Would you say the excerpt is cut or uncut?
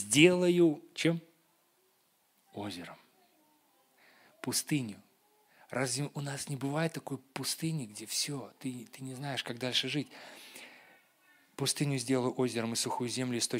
uncut